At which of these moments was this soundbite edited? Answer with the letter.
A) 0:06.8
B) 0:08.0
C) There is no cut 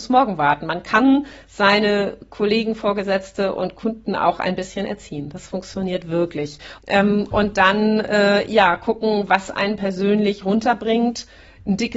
A